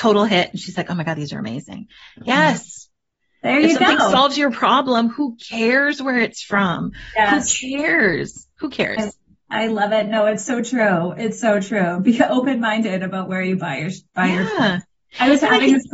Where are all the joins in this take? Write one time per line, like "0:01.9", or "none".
none